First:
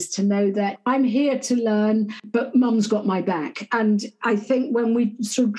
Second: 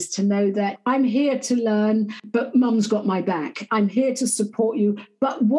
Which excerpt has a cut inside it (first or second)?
second